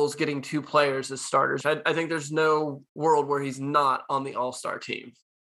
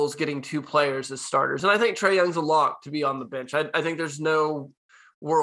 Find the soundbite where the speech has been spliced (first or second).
first